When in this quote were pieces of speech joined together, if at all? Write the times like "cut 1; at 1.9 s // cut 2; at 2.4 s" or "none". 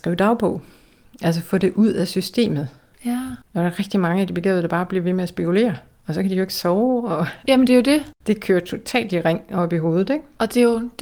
cut 1; at 7.5 s